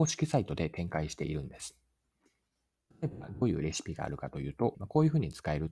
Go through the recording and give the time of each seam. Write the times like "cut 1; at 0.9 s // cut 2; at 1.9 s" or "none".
cut 1; at 4.7 s

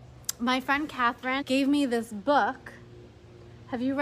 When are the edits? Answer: cut 1; at 1.4 s

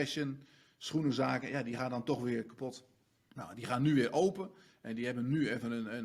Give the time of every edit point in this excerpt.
cut 1; at 3.3 s

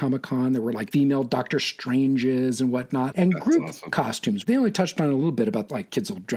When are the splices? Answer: cut 1; at 3.1 s

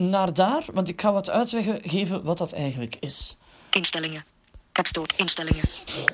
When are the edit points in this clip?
none

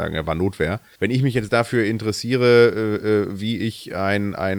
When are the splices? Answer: cut 1; at 1.0 s

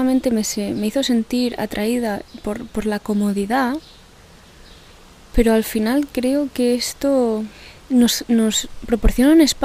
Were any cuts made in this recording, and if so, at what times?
none

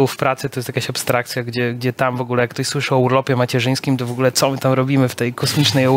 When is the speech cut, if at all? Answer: none

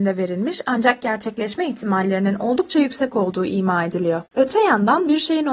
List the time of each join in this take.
cut 1; at 4.3 s

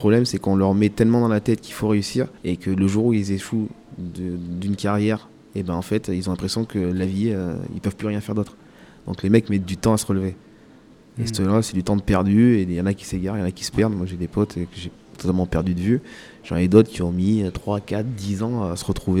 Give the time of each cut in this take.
cut 1; at 2.4 s

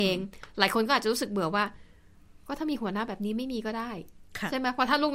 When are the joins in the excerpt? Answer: none

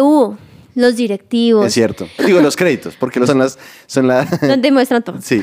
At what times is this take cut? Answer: cut 1; at 2.2 s // cut 2; at 3.3 s

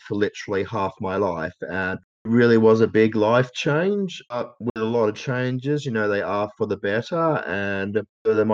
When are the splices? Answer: none

